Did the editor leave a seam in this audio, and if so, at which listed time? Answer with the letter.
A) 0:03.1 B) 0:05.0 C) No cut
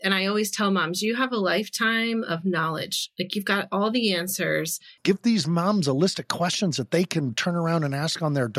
B